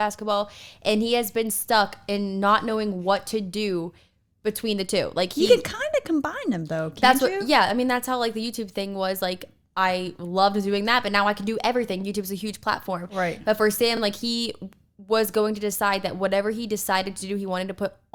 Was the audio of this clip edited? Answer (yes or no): no